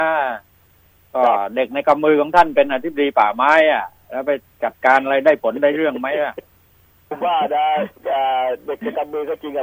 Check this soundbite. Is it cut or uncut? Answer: cut